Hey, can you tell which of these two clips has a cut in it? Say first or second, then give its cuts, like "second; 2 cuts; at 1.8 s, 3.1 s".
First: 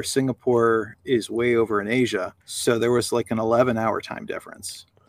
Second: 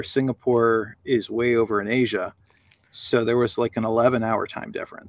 first; 1 cut; at 2.4 s